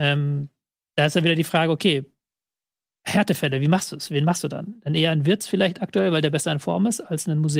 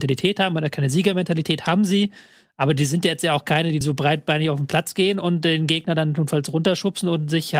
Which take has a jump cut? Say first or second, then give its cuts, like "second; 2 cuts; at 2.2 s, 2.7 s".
second; 1 cut; at 3.8 s